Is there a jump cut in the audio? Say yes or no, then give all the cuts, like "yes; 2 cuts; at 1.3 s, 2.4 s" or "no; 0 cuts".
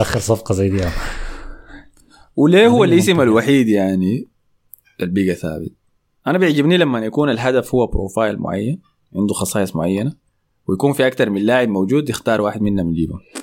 no; 0 cuts